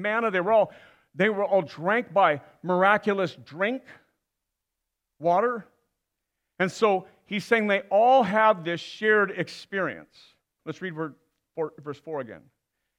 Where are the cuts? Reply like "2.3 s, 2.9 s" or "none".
10.6 s